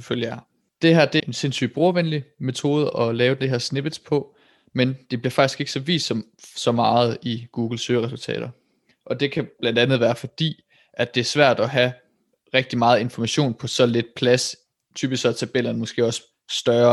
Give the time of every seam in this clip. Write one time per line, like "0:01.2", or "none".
0:01.2

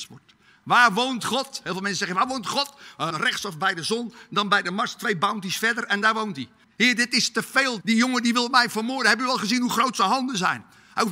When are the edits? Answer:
0:03.1
0:06.6
0:07.8

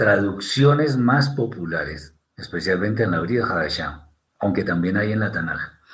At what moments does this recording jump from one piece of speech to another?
0:02.2

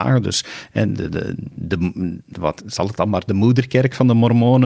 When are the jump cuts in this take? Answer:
0:02.6

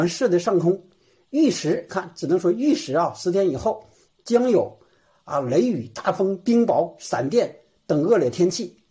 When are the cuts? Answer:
none

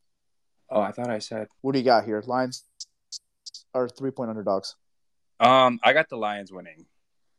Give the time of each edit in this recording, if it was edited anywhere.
0:01.6

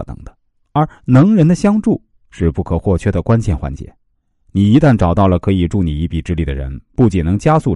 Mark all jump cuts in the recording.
none

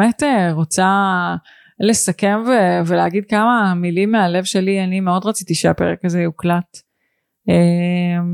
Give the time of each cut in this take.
none

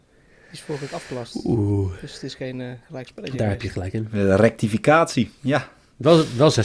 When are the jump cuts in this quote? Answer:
none

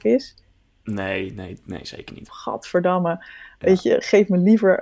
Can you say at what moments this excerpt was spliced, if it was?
0:02.3

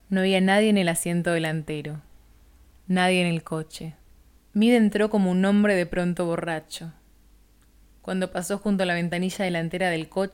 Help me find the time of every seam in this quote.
0:04.4

